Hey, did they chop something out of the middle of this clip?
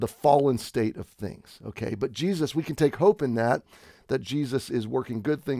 no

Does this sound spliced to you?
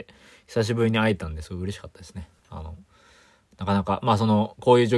no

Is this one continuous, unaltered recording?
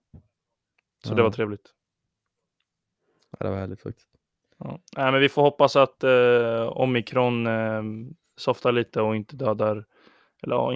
yes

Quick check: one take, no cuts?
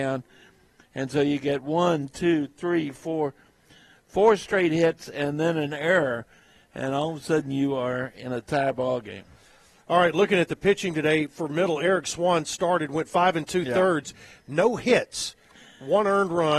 yes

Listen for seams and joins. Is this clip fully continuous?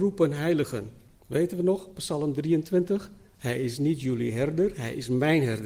no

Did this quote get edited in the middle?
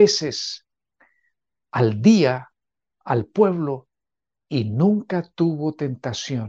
no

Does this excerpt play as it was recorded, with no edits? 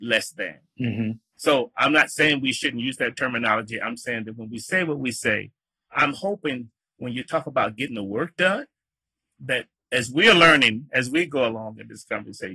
yes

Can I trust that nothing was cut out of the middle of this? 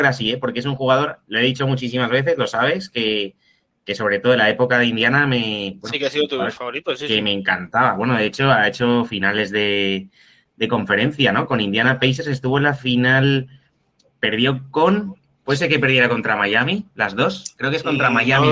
yes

